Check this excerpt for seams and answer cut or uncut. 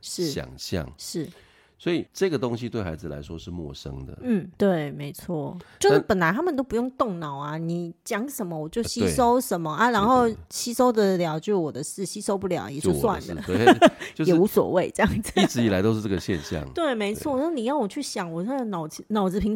cut